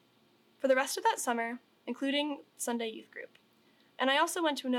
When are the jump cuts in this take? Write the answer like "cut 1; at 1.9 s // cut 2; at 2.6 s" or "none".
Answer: cut 1; at 1.7 s